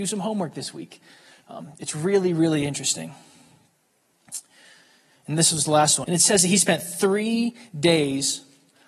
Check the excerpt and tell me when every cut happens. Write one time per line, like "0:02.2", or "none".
0:06.0